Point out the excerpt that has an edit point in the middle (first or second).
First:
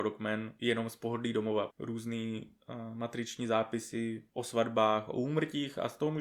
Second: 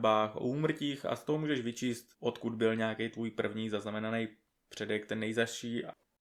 first